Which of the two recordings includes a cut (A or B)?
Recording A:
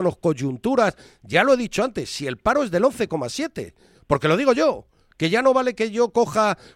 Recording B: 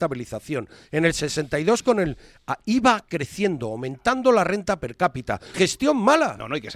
B